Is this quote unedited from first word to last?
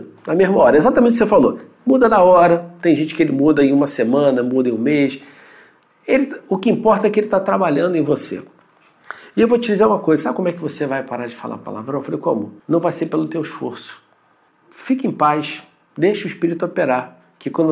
no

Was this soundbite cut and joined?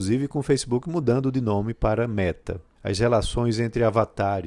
yes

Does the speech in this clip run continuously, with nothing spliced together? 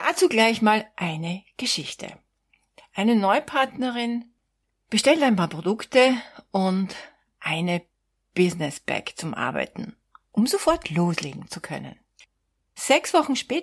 no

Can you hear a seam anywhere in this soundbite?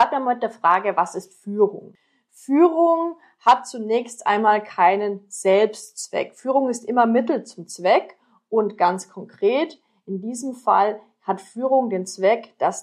no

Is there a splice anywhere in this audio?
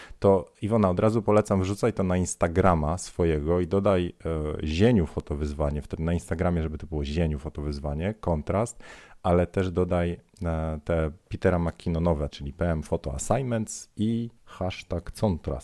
yes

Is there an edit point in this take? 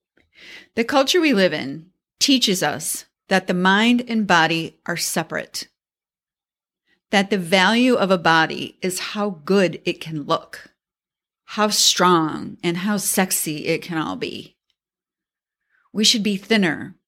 no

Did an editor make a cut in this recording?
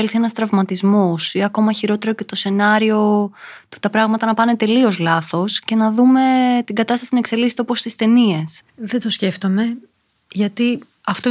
yes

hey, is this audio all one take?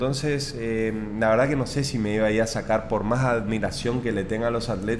yes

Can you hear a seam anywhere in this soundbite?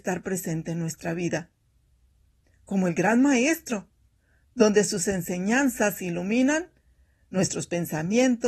no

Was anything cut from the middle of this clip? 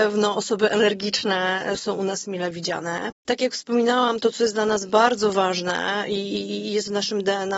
yes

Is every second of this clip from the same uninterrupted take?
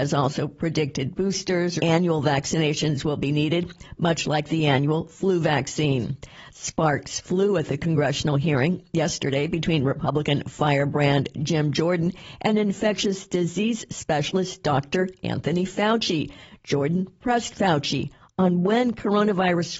no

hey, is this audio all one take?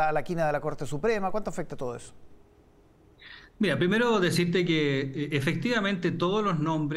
yes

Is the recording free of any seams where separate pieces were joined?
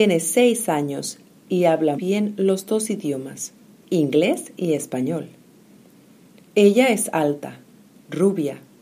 no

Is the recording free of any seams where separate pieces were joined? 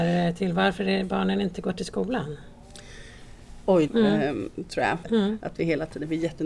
no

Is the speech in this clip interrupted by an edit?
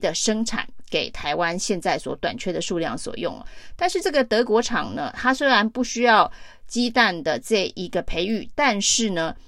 no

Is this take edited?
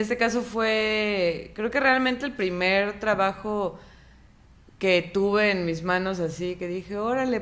no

